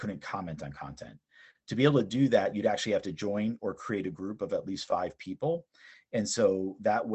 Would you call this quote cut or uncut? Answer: uncut